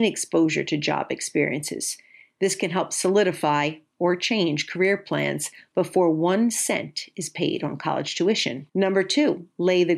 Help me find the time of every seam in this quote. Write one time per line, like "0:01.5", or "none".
0:08.7